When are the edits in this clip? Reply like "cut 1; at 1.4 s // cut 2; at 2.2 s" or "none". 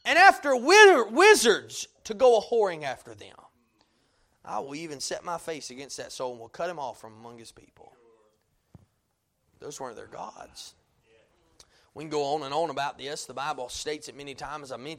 none